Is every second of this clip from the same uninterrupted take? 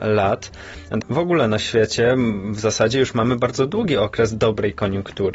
no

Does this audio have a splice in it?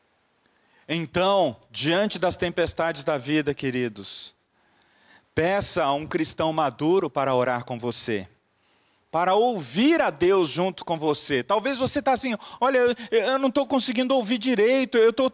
no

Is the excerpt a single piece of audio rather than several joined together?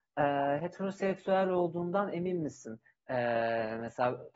no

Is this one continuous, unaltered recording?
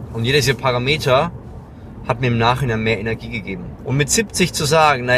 no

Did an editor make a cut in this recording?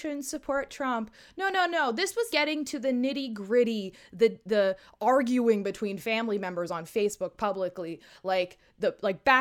yes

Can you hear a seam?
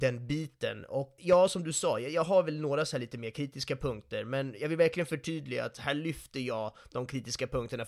yes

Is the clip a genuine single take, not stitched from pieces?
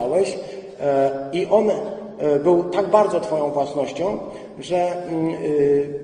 yes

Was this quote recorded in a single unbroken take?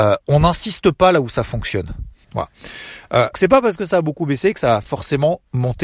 no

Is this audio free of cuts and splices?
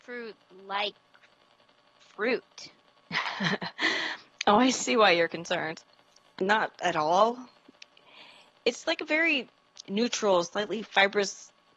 yes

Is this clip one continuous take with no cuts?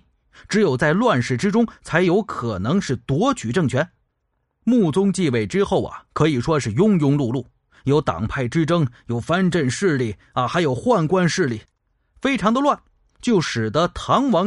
yes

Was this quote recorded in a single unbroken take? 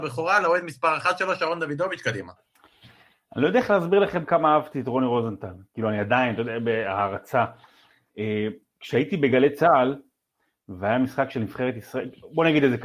yes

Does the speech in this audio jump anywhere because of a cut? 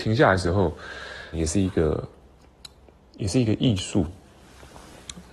yes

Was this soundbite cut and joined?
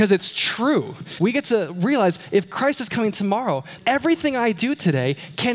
yes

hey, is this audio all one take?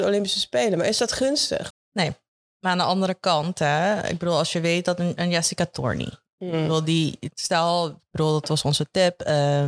no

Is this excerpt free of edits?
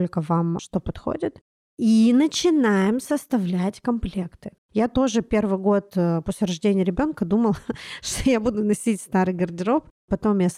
no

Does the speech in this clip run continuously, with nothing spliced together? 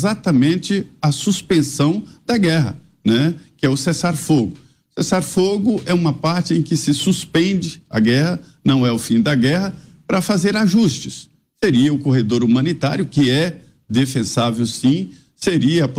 yes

